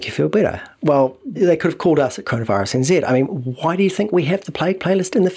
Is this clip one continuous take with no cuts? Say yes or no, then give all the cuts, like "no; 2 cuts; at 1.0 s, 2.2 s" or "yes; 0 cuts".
no; 1 cut; at 1.4 s